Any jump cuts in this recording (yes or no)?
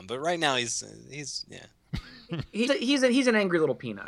yes